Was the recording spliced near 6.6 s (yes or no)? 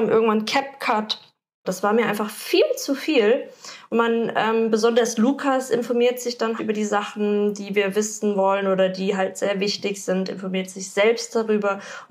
yes